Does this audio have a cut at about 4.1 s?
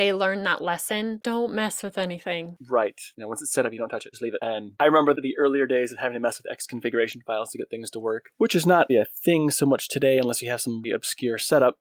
no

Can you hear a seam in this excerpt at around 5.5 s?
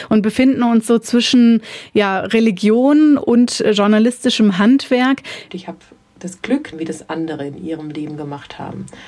yes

